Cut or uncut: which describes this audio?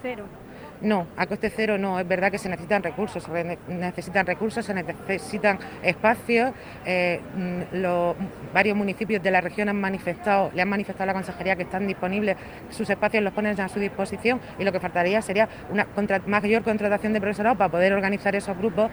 uncut